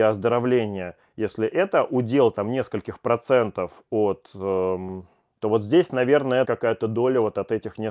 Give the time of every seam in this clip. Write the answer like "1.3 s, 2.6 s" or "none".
5.4 s, 6.4 s